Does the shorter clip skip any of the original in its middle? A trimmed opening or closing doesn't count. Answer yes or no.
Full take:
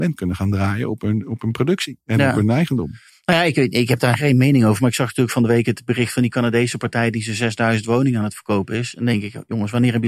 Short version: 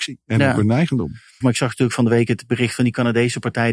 yes